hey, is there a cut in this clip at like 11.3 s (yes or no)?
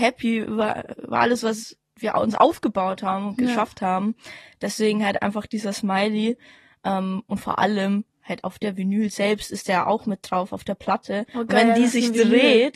no